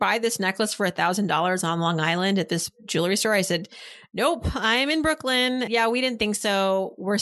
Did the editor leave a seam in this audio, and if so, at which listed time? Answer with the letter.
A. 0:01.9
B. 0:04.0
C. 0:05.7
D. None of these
C